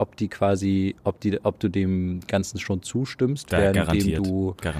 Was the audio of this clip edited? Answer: no; 0 cuts

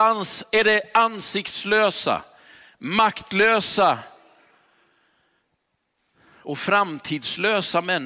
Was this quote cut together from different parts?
no; 0 cuts

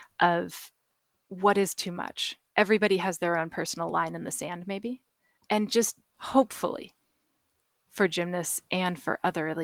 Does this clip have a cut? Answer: no; 0 cuts

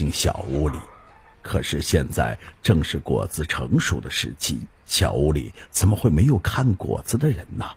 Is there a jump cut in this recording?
yes; 2 cuts; at 1.3 s, 4.8 s

